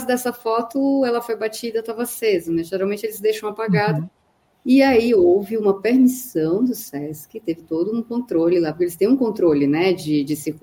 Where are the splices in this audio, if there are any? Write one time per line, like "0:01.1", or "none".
none